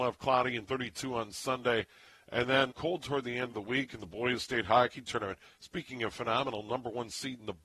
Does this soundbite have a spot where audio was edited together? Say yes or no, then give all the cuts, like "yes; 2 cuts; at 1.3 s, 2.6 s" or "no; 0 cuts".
yes; 2 cuts; at 2.7 s, 5.5 s